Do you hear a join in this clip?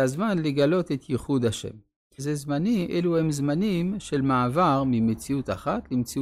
yes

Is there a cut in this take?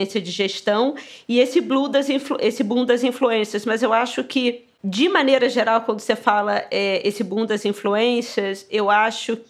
no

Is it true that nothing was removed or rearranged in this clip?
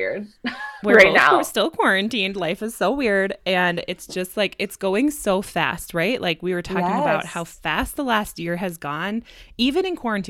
yes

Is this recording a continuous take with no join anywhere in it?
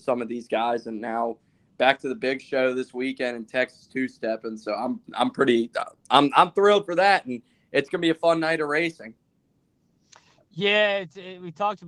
yes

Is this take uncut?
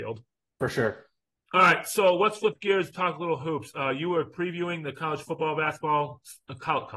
yes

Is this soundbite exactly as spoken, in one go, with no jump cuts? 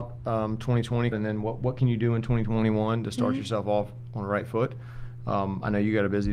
no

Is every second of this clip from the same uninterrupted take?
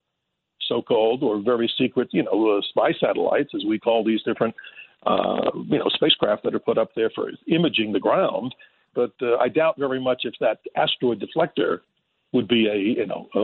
no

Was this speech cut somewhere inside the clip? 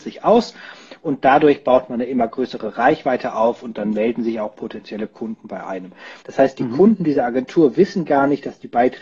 yes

